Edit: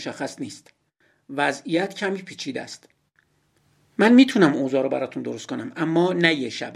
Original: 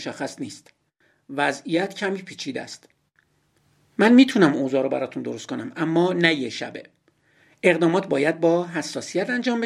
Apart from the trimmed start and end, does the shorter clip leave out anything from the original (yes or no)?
no